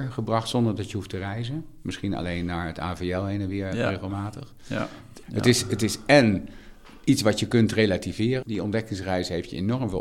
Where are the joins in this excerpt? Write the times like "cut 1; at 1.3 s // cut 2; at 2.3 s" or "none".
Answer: cut 1; at 5.2 s // cut 2; at 8.4 s